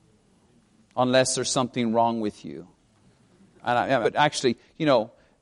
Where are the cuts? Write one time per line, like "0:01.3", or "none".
0:04.0